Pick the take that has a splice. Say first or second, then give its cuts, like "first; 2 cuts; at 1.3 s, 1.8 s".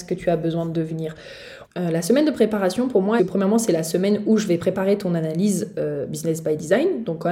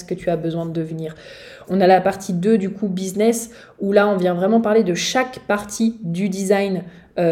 first; 2 cuts; at 1.6 s, 3.2 s